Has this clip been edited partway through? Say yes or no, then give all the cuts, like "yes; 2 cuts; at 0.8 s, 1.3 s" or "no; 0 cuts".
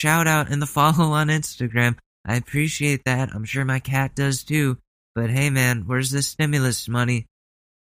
no; 0 cuts